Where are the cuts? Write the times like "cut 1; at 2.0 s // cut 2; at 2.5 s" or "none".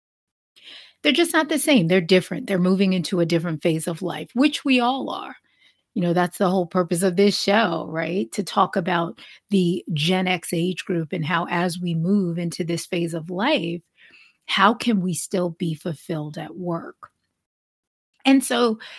none